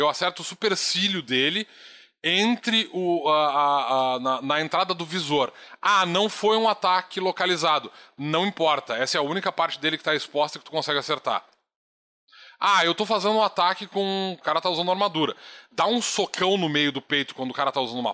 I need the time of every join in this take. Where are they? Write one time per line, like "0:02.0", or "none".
0:14.4

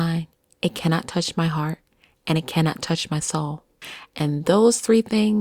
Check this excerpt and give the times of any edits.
none

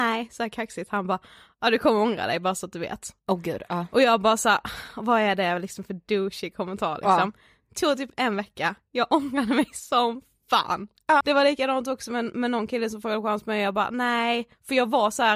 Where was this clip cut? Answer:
0:11.2

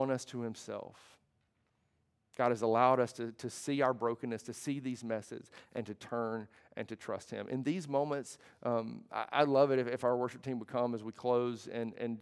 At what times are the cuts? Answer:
none

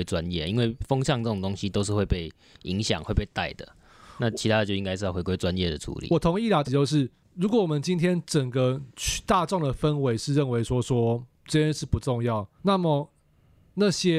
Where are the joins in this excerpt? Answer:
0:06.6
0:12.6

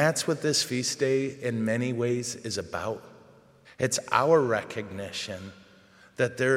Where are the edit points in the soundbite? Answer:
0:03.6

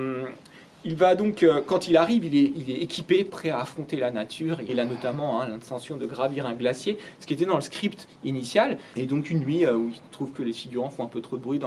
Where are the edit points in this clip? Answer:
0:04.7
0:08.9

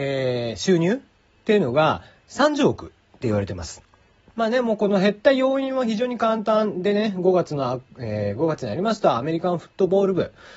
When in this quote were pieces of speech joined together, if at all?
0:04.3

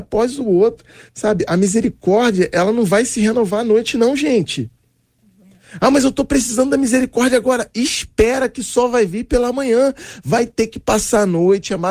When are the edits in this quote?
none

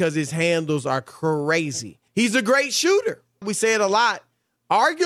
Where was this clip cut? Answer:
0:02.1
0:03.4

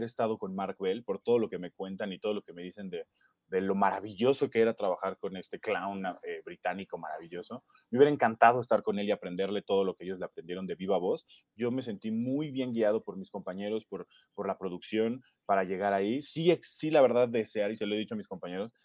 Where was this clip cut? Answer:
0:11.4

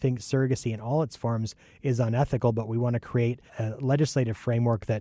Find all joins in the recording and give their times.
0:03.5

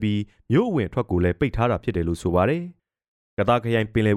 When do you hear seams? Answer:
0:02.8

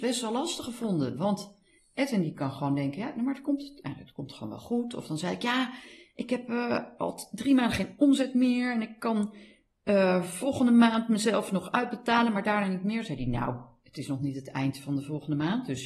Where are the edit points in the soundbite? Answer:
0:07.0

